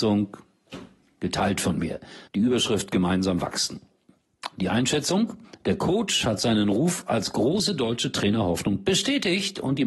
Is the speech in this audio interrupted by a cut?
yes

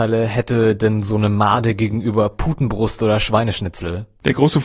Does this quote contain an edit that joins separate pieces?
no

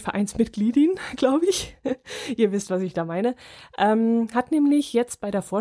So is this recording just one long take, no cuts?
yes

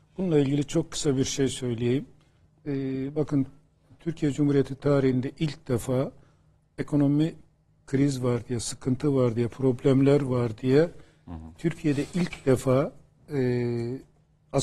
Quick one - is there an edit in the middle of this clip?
no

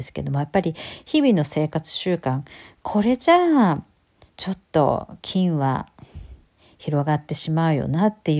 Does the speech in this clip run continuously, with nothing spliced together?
yes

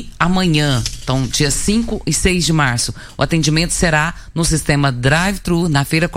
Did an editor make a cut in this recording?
no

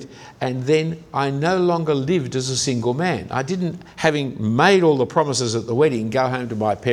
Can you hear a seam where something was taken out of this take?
no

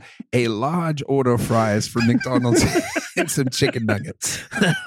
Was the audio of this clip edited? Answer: no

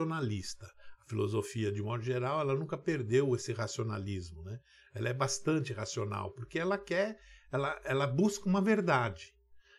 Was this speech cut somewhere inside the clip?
no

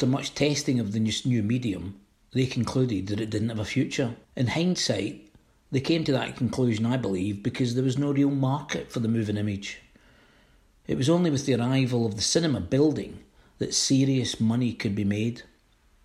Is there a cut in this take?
yes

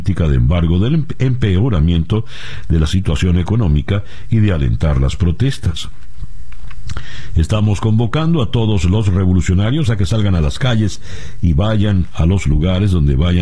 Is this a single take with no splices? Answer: no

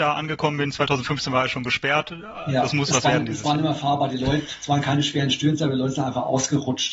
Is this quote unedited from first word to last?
yes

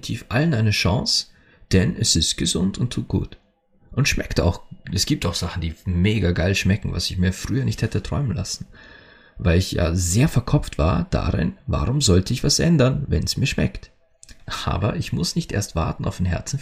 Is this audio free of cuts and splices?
yes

